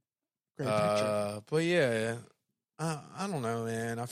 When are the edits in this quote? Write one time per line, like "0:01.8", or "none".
none

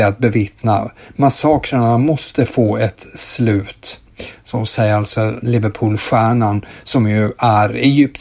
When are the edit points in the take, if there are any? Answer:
0:05.4

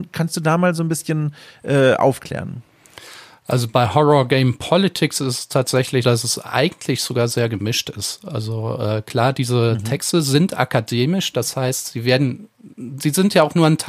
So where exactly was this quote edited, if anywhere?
0:06.0

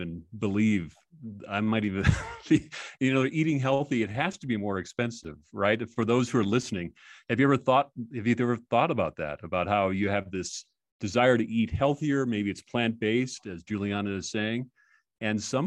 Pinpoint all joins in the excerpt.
none

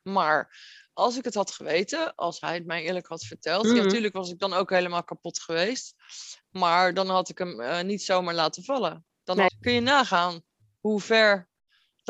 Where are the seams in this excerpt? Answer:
0:09.5

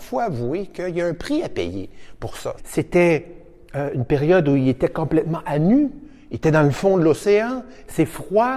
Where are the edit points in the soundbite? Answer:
0:02.6

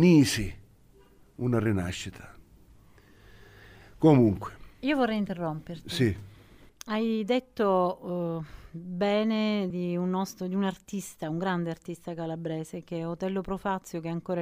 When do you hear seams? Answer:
0:09.7

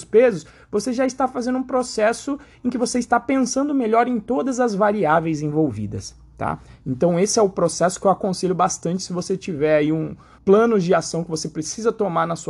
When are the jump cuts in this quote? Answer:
0:10.4

